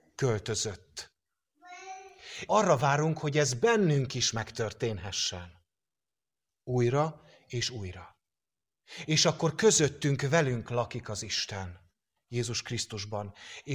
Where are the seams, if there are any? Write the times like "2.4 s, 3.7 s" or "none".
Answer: 2.5 s